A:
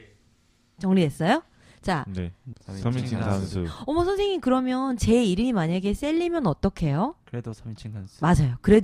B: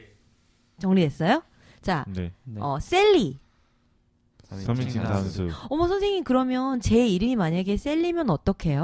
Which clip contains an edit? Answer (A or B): A